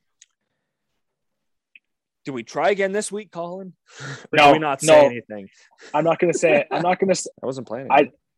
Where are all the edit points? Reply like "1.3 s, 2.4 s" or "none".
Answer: 7.3 s